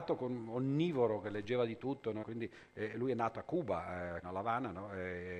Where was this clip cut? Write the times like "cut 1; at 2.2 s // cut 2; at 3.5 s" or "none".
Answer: cut 1; at 2.2 s // cut 2; at 4.2 s

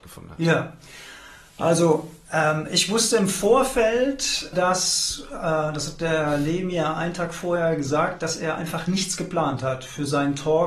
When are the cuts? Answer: cut 1; at 4.5 s

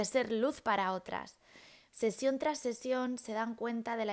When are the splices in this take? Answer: cut 1; at 1.9 s

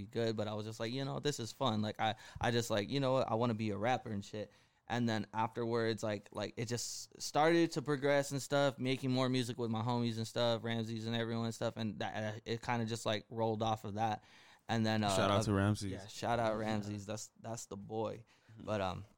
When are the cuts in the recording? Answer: none

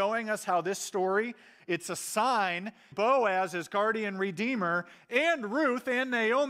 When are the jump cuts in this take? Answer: cut 1; at 1.6 s // cut 2; at 2.9 s

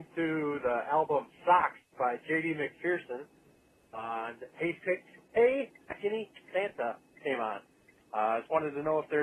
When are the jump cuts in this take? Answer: none

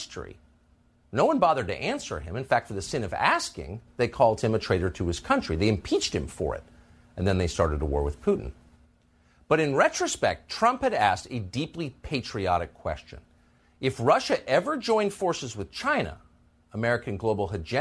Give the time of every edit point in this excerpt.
none

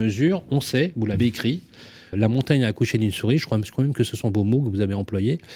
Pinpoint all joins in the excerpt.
cut 1; at 2.1 s

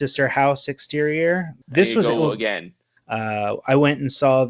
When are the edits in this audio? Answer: cut 1; at 1.6 s // cut 2; at 3.0 s

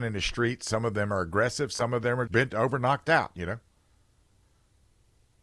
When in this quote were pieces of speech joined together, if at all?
cut 1; at 2.3 s

